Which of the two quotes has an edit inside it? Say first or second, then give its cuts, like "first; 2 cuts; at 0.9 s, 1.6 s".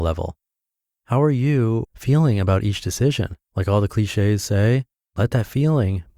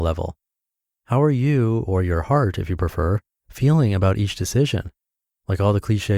first; 2 cuts; at 1.8 s, 3.4 s